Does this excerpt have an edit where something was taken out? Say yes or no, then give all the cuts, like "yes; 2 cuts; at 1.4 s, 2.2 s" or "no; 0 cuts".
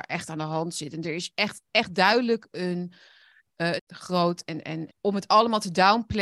yes; 2 cuts; at 3.8 s, 4.9 s